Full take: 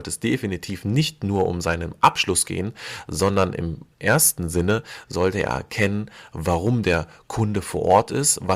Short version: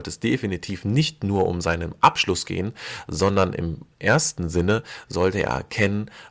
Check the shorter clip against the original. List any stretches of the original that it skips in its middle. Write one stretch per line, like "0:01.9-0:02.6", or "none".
none